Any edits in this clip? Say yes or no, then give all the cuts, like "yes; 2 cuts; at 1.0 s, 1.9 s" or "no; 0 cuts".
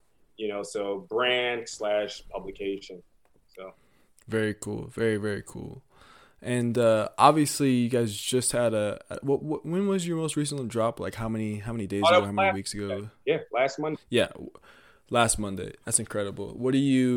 no; 0 cuts